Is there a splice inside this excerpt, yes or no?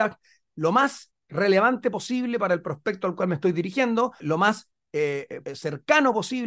yes